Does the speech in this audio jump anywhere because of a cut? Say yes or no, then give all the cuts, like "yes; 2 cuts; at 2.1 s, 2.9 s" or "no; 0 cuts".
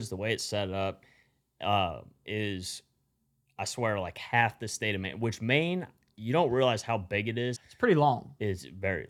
yes; 1 cut; at 7.6 s